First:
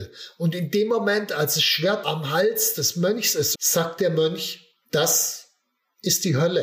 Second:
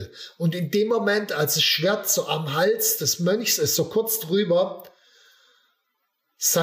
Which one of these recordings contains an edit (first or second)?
first